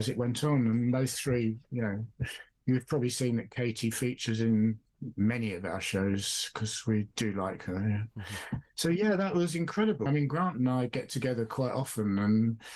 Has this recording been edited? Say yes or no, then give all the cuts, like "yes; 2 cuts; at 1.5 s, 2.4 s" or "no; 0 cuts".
yes; 1 cut; at 10.1 s